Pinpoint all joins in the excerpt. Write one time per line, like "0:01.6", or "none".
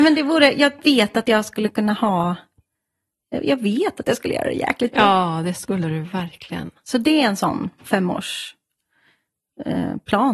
none